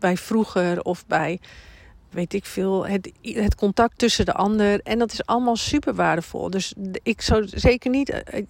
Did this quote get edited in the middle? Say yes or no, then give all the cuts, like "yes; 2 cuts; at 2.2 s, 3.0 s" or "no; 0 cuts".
yes; 1 cut; at 2.1 s